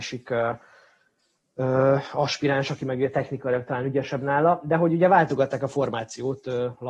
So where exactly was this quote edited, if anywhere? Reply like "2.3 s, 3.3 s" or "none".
none